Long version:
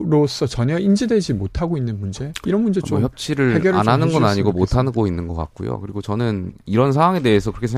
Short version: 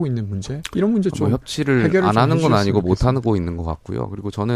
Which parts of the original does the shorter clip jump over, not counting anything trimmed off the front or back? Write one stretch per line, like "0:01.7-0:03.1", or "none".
none